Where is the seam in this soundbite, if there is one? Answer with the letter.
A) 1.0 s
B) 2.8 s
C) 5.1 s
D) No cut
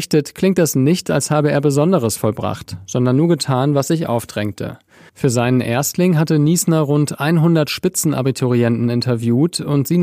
C